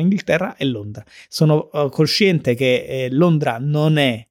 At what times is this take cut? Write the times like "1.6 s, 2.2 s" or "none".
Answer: none